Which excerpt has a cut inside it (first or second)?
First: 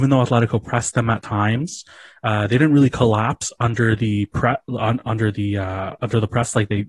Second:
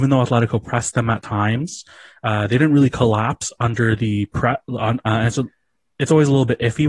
second